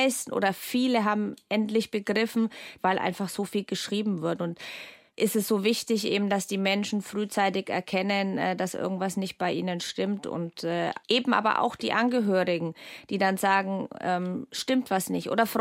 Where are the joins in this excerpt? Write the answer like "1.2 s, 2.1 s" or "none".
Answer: 2.8 s, 11.0 s